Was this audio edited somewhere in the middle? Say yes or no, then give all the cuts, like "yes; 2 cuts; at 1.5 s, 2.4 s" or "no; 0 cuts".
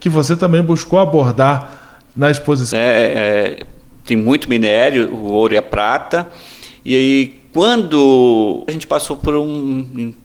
yes; 2 cuts; at 2.7 s, 8.7 s